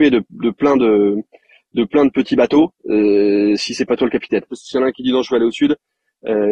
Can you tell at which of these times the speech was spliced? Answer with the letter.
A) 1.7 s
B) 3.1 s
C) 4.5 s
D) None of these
C